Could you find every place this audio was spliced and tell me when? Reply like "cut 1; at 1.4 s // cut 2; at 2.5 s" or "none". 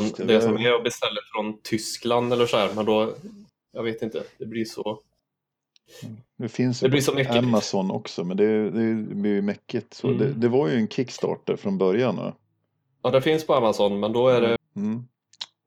cut 1; at 14.6 s